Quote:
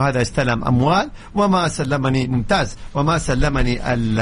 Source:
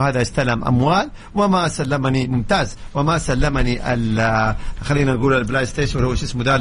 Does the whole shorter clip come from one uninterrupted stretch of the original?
yes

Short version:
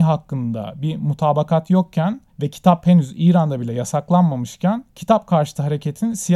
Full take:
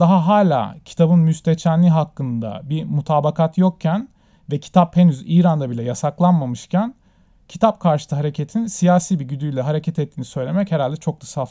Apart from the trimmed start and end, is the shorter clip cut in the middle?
yes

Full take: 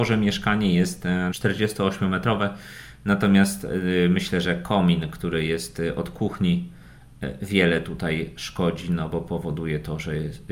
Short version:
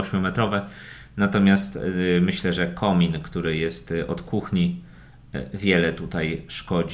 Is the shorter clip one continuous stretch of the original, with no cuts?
yes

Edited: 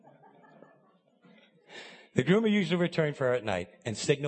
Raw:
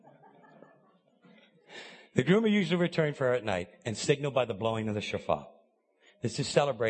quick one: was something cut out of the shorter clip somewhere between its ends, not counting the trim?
no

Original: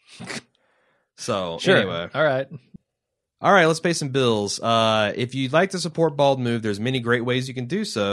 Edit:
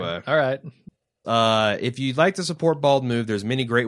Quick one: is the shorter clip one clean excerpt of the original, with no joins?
no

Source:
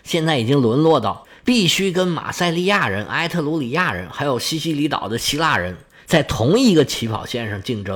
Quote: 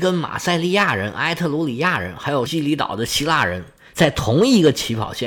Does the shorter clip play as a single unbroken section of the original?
no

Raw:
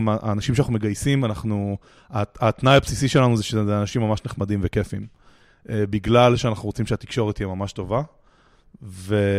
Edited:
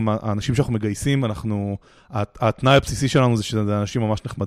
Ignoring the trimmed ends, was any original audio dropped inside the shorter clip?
no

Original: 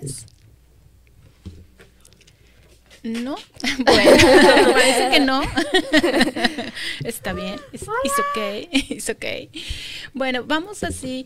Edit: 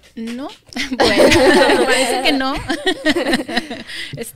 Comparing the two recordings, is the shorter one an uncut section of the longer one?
yes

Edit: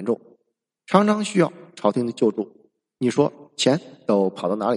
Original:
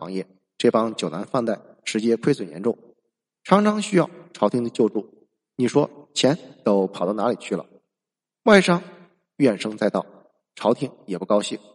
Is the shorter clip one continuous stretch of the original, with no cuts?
yes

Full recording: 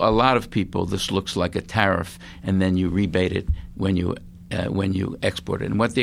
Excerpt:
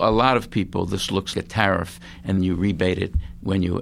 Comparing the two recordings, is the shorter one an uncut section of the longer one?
no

